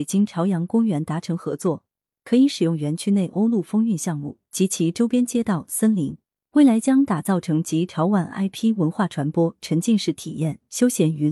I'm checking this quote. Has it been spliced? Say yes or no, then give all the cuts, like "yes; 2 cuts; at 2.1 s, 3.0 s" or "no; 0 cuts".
no; 0 cuts